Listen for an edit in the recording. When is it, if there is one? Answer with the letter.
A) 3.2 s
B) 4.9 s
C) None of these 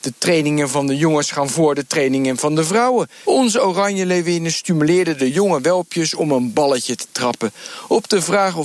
A